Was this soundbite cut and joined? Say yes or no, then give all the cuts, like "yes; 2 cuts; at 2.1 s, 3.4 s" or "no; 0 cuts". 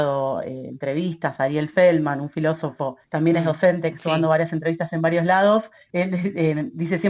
no; 0 cuts